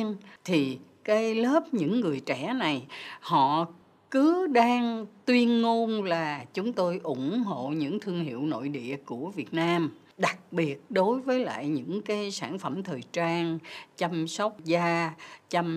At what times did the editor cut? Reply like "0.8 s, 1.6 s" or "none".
none